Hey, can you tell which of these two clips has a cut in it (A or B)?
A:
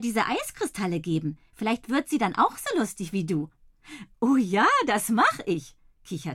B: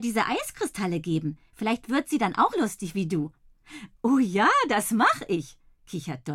B